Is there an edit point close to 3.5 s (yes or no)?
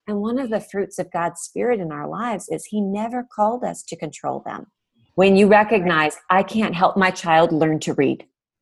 no